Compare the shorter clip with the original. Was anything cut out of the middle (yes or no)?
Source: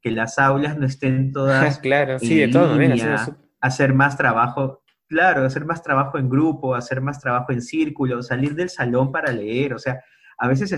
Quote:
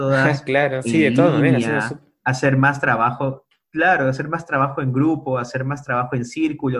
no